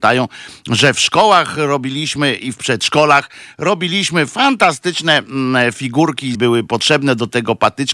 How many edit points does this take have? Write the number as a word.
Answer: one